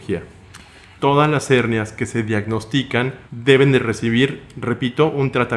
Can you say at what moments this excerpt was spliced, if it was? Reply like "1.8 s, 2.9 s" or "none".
1.0 s, 3.3 s